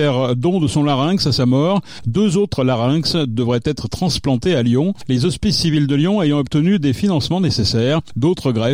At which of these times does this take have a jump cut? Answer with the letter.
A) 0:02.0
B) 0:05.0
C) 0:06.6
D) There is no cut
A